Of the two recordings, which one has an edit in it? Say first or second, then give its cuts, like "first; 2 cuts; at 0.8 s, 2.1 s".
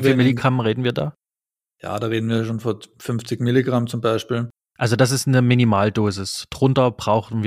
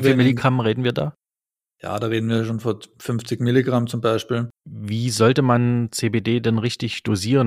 second; 1 cut; at 4.6 s